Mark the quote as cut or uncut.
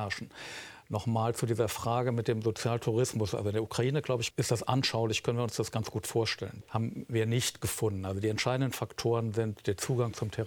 cut